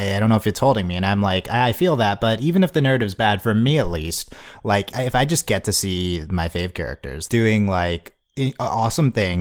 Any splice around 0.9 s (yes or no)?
no